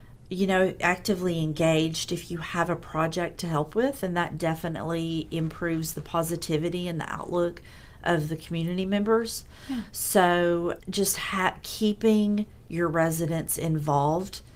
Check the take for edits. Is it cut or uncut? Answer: cut